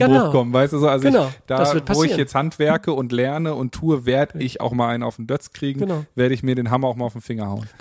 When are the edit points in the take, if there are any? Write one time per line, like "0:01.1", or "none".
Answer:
none